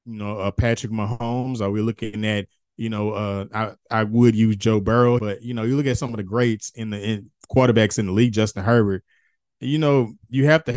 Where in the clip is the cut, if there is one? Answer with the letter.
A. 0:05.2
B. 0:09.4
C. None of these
A